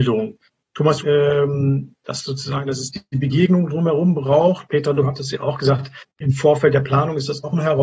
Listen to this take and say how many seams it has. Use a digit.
2